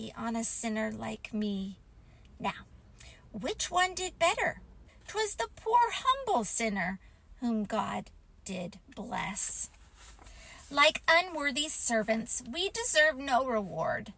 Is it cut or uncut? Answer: cut